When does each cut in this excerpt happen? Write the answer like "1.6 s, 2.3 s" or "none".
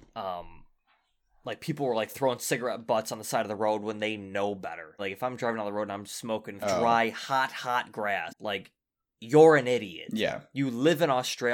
5.0 s, 6.6 s, 8.3 s